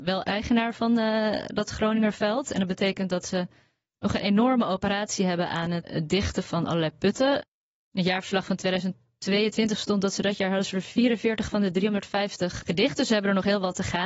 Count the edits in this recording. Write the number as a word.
one